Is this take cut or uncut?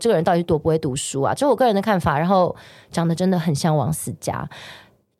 uncut